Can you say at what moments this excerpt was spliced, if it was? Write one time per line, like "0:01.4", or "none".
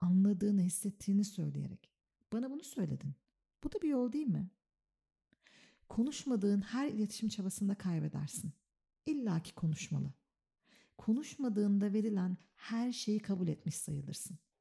0:03.4